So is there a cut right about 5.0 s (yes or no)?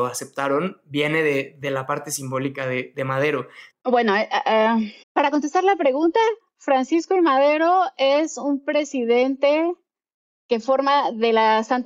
yes